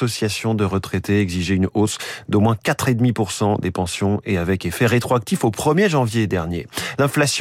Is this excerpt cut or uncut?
uncut